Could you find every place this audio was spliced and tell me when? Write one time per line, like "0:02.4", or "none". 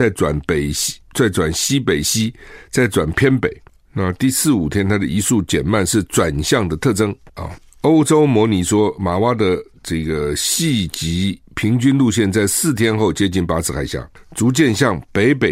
0:01.0
0:07.4